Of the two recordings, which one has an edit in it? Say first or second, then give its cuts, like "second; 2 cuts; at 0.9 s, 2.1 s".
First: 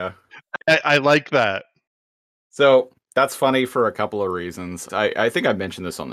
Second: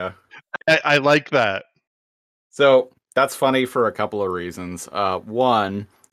first; 1 cut; at 4.9 s